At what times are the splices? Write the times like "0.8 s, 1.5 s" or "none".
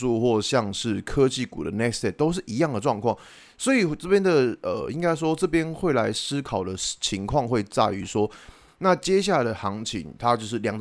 8.7 s